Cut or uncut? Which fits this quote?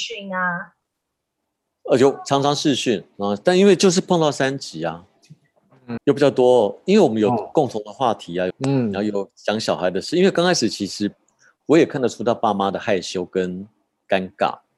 cut